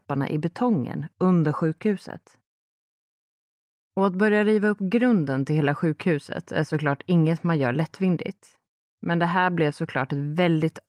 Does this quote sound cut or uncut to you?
uncut